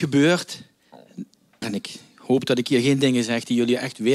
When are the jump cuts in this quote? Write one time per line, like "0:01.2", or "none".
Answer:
0:01.6

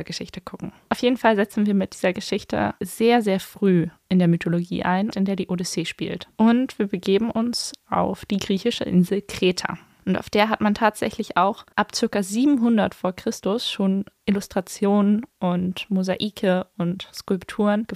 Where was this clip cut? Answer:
0:05.1

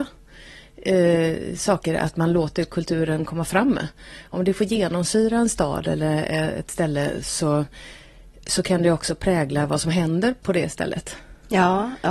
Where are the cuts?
none

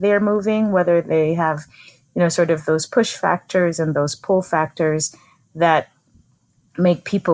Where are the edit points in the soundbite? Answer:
none

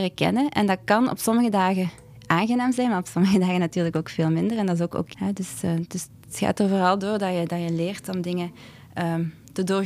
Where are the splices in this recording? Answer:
0:05.1

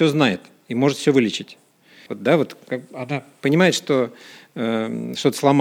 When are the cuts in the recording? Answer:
0:02.1

